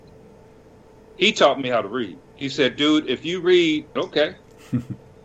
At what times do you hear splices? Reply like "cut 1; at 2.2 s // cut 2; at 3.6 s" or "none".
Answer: cut 1; at 2.3 s // cut 2; at 4.0 s